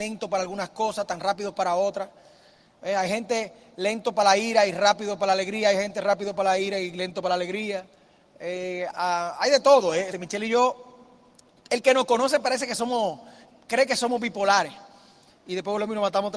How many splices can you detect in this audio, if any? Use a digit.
3